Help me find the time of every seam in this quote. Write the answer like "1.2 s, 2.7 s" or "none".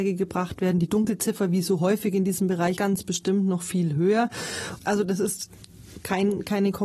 2.8 s, 4.8 s